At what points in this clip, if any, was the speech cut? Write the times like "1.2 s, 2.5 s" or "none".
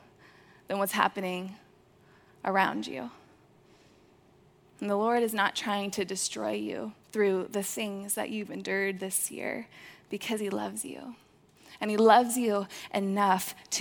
7.0 s